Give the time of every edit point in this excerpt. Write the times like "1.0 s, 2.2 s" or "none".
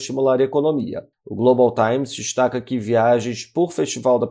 1.1 s